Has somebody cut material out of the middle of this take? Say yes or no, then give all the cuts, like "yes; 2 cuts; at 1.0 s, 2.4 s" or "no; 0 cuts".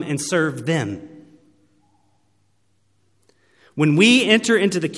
no; 0 cuts